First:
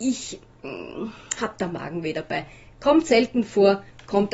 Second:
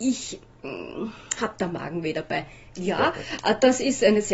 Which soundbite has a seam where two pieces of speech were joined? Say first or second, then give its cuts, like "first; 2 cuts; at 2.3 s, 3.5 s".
second; 1 cut; at 2.7 s